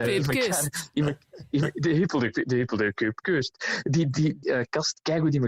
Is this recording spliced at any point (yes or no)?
yes